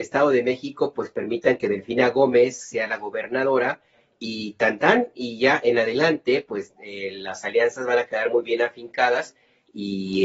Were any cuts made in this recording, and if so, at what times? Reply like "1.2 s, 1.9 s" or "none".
none